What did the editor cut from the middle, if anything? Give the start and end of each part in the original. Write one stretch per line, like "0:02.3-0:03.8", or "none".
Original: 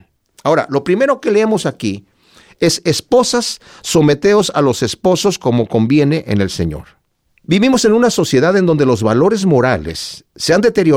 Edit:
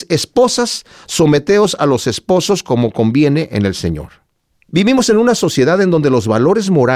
none